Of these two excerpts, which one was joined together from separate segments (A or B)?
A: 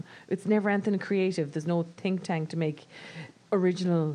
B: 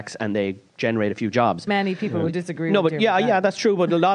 B